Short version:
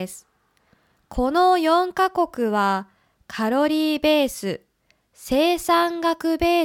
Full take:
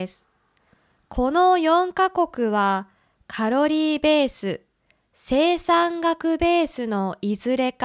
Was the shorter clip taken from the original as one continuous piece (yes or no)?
yes